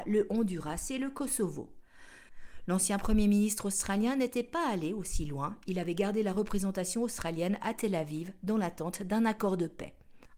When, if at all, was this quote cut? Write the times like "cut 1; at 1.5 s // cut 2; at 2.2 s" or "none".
cut 1; at 2.6 s